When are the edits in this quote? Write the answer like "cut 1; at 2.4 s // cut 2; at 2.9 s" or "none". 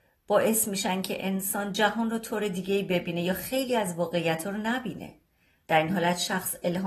none